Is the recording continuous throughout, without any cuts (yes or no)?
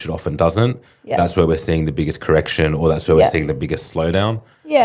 yes